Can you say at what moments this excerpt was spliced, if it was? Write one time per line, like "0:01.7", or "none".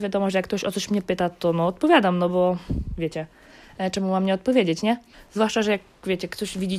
0:05.1